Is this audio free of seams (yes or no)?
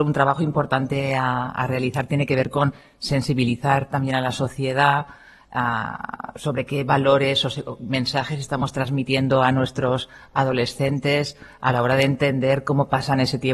yes